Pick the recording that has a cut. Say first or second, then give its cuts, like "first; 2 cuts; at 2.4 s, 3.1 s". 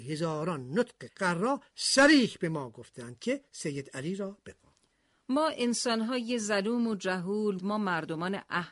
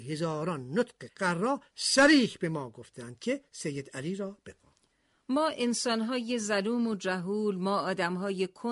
first; 1 cut; at 7.6 s